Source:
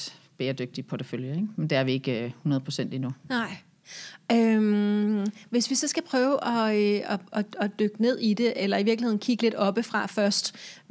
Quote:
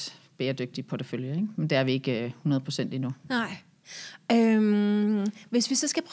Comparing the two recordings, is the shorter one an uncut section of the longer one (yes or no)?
yes